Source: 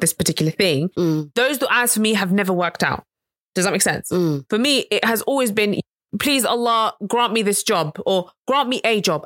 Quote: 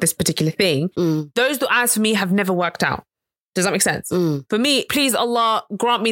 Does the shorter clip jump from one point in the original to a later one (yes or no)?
yes